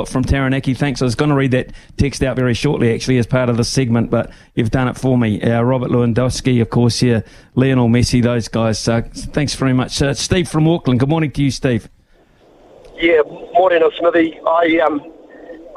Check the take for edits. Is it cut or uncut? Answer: uncut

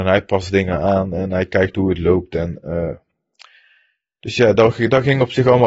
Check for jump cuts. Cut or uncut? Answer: uncut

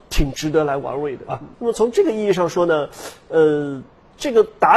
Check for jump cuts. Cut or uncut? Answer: cut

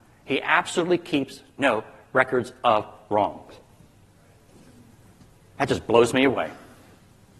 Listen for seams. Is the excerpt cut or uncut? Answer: uncut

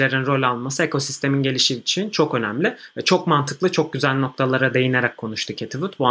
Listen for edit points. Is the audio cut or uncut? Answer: uncut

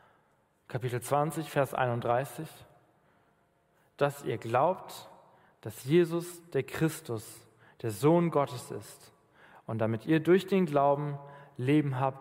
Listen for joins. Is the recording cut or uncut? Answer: uncut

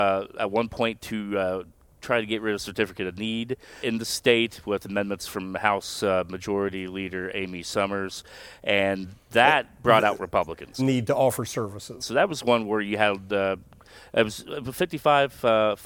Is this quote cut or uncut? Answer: cut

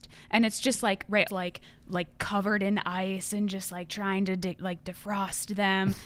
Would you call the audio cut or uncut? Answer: cut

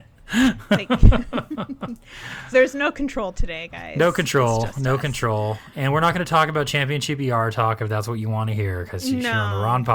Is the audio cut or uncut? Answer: cut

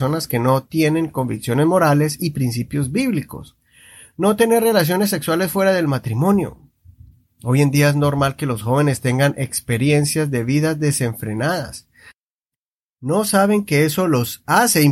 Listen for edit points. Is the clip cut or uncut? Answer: uncut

